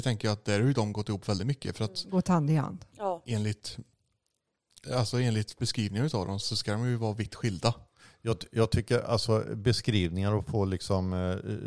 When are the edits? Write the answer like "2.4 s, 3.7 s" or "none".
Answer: 6.4 s